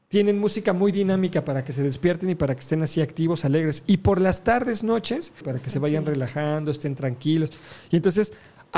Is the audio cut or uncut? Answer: cut